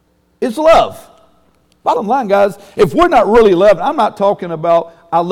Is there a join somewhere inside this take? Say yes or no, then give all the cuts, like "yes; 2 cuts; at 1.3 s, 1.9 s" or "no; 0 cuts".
no; 0 cuts